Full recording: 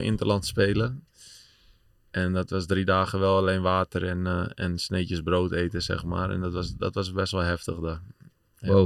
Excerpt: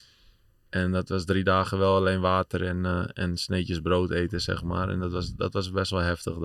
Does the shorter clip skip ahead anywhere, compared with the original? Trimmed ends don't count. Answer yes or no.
no